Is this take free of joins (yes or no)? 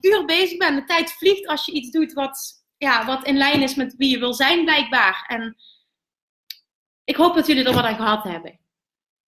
yes